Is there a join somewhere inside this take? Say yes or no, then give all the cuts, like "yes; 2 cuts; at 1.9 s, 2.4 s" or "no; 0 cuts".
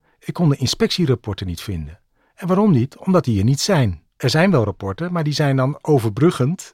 no; 0 cuts